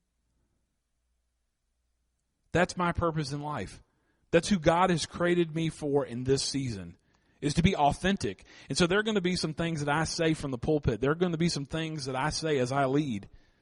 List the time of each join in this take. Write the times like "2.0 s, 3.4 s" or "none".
none